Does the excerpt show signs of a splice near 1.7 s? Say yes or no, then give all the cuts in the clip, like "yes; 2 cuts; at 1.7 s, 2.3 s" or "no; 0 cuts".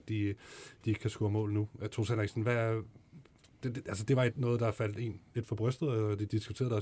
no; 0 cuts